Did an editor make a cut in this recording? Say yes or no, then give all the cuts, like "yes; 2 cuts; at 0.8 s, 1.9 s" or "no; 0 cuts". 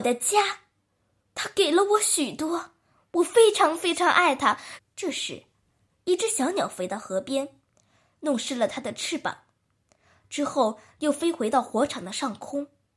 yes; 1 cut; at 4.8 s